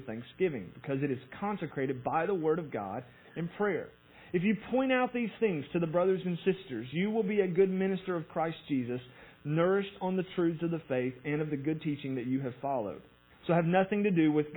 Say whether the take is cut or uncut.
uncut